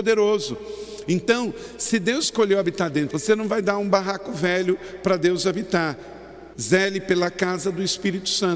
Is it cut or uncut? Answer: cut